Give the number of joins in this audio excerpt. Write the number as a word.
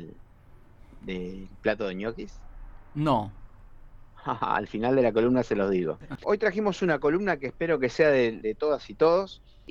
two